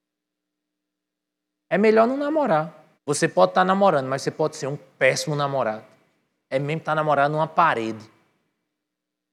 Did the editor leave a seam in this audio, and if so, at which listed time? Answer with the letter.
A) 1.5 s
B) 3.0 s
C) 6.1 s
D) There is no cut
B